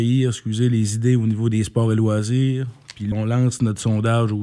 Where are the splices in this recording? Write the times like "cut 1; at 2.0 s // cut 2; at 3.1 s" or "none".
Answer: cut 1; at 3.1 s